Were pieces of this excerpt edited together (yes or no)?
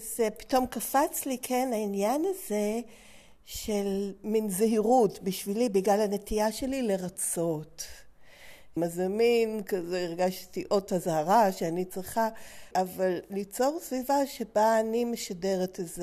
yes